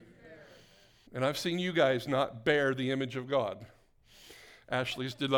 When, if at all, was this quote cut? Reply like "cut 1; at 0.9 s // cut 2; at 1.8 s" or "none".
cut 1; at 1.1 s